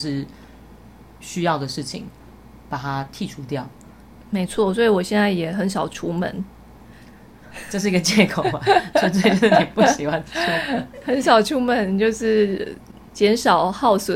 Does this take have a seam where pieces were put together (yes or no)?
no